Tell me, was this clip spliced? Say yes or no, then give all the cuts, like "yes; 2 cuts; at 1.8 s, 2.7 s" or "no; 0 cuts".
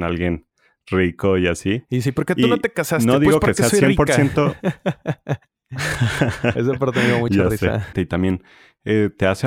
yes; 1 cut; at 7.9 s